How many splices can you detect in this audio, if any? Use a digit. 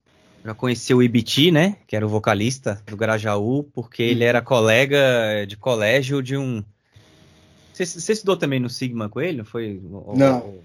0